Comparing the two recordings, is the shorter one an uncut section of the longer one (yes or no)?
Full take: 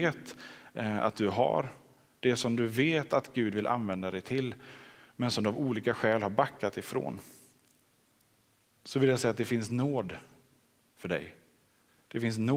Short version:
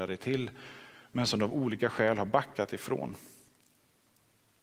yes